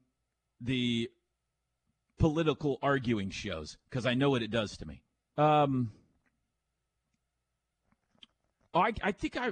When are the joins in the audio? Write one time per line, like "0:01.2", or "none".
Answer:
0:05.4